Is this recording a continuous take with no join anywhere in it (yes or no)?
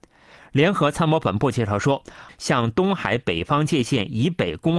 no